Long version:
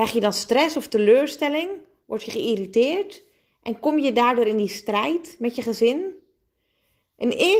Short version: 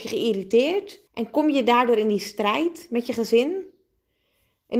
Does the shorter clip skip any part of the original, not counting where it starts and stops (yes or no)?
yes